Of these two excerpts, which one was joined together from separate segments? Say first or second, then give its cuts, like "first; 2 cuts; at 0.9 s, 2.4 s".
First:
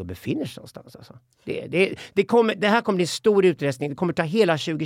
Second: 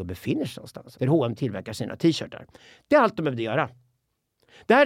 second; 1 cut; at 0.9 s